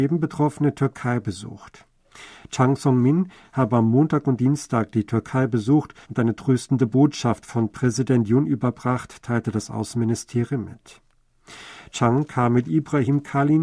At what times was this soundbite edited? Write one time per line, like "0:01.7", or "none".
0:03.4
0:06.0